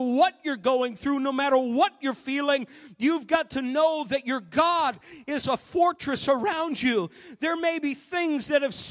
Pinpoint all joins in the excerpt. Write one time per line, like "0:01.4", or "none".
none